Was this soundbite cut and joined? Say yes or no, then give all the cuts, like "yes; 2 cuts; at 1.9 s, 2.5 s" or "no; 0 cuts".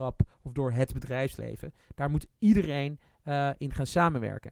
no; 0 cuts